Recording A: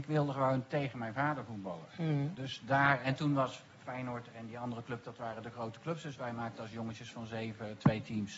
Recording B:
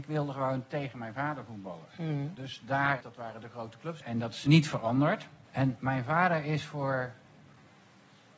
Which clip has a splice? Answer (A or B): B